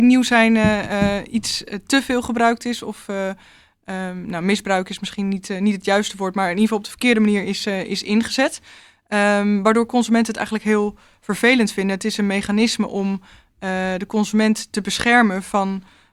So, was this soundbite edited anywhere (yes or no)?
no